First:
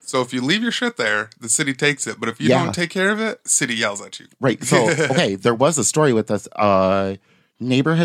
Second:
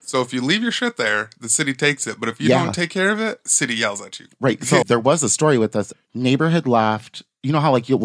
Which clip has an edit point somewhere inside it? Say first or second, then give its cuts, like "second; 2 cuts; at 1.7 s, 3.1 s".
second; 2 cuts; at 4.8 s, 5.9 s